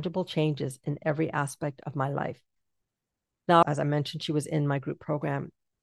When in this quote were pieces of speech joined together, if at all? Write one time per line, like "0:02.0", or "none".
0:03.6